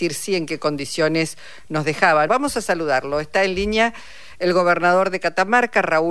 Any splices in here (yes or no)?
yes